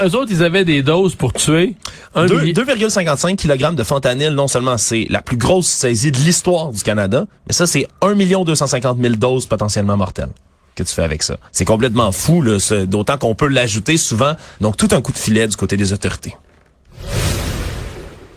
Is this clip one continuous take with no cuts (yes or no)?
no